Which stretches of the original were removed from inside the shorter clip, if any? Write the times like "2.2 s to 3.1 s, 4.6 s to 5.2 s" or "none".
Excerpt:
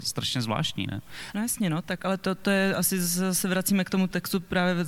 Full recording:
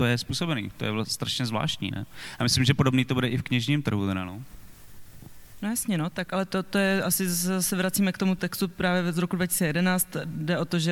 2.4 s to 5.6 s